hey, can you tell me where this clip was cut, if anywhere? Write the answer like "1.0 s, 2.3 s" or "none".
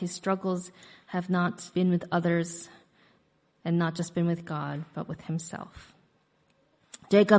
1.7 s